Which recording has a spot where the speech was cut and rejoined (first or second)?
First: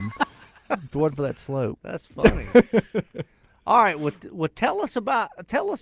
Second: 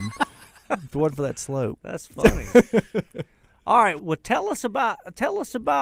second